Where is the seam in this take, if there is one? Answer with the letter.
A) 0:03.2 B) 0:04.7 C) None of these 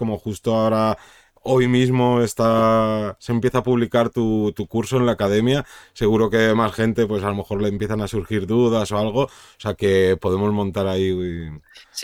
C